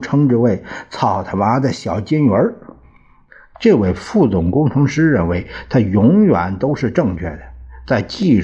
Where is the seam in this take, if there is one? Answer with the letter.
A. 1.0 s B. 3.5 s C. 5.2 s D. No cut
B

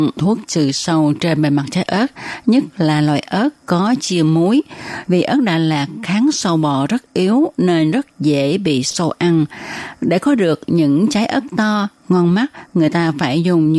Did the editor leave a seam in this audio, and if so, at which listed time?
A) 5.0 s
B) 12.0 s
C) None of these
A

